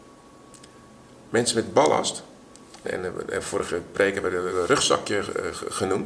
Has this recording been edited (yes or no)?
yes